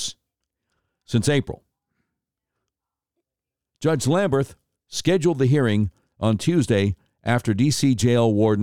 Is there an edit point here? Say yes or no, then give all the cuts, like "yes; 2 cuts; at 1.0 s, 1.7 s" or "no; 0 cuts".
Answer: no; 0 cuts